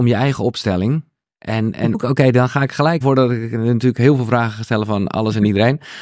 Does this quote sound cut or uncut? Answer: cut